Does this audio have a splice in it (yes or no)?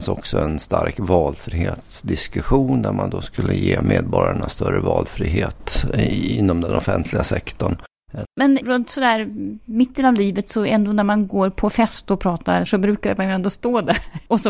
yes